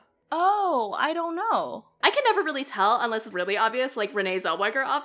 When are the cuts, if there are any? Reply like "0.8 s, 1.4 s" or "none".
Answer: 2.0 s, 3.3 s